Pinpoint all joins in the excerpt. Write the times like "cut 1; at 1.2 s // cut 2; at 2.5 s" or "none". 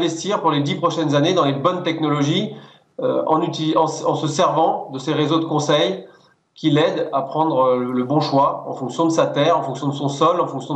none